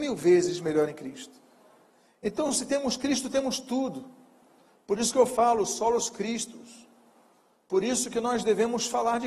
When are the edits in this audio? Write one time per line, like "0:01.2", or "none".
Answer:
none

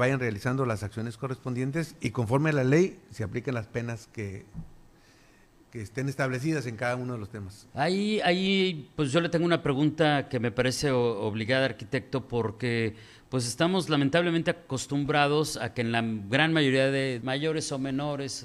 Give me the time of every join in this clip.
0:17.2

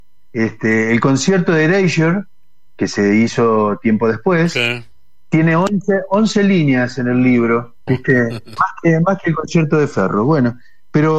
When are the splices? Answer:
0:07.9

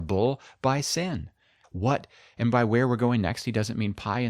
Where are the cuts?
0:01.6

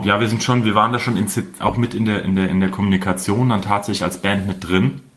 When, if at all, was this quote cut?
0:01.6

